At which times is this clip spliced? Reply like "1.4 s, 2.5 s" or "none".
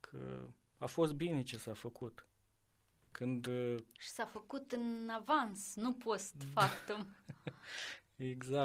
none